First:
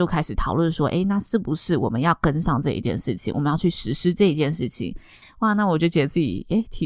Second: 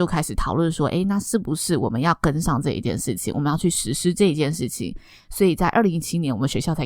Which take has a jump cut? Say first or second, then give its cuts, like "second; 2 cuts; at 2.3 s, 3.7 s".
first; 1 cut; at 5.2 s